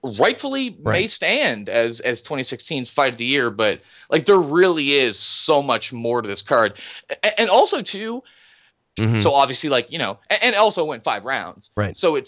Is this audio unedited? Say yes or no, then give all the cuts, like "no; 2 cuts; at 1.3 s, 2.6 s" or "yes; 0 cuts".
no; 1 cut; at 9.0 s